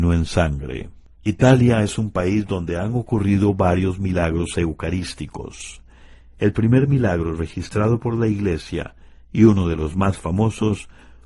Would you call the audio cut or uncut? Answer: cut